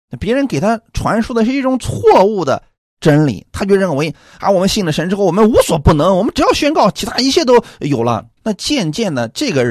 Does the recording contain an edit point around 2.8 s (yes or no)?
no